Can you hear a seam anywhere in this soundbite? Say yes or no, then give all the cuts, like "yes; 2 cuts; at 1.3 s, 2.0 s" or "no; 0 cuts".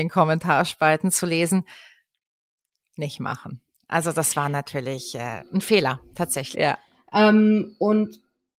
yes; 1 cut; at 6.5 s